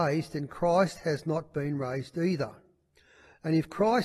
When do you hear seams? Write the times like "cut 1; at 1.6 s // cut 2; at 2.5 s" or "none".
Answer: none